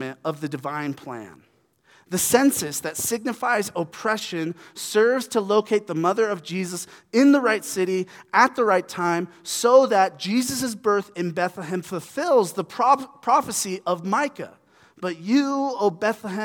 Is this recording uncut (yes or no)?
yes